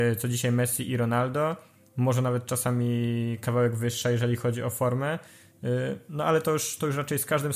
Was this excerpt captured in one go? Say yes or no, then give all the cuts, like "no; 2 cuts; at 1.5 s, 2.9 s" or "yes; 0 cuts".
yes; 0 cuts